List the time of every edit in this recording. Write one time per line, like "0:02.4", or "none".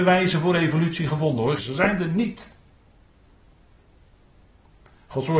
0:01.6